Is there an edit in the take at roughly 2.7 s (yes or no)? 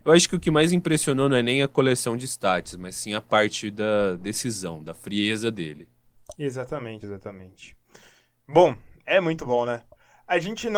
no